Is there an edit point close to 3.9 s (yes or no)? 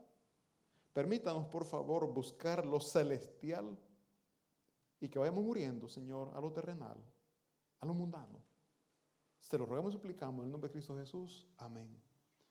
no